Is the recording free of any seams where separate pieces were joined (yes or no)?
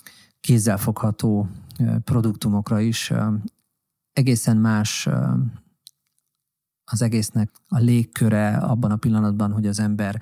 no